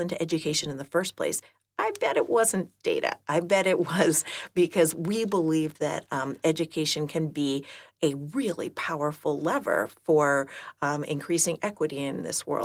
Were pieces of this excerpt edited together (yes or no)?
no